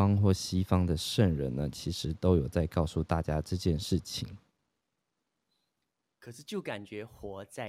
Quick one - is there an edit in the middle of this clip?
no; 0 cuts

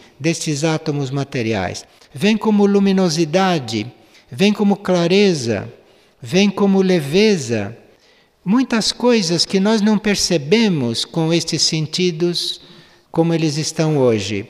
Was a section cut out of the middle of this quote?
no; 0 cuts

